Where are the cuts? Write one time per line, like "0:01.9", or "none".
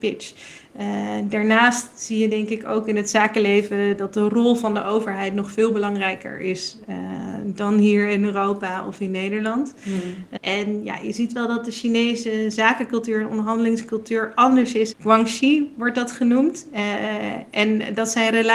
0:10.4
0:14.9